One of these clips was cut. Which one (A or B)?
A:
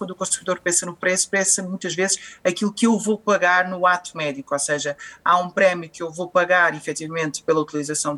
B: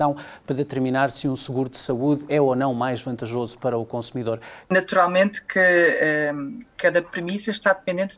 B